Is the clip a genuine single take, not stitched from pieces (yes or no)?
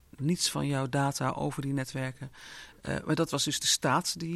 yes